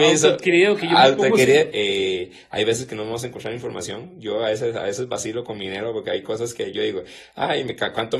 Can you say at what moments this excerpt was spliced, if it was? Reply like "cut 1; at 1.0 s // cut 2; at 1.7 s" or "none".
cut 1; at 1.7 s